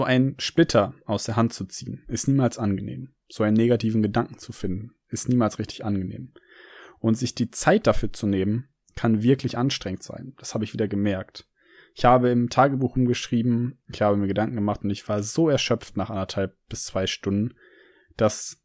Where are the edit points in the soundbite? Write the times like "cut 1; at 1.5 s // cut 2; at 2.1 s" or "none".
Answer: none